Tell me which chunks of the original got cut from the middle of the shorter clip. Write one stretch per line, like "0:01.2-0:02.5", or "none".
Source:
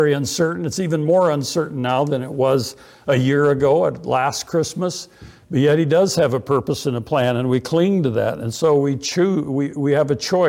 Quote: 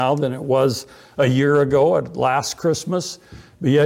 none